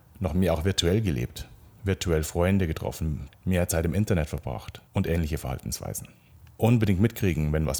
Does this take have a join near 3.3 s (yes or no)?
yes